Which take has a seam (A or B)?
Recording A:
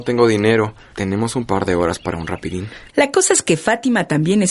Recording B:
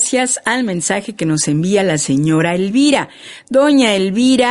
A